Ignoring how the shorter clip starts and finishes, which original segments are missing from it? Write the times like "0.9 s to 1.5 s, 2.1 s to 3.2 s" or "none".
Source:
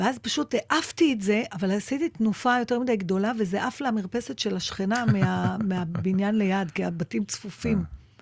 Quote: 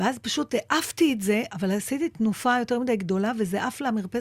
none